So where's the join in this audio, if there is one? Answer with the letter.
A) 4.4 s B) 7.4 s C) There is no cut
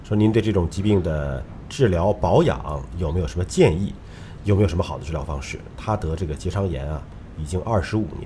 A